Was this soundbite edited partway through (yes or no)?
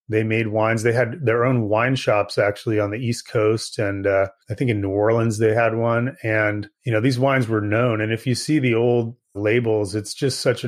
yes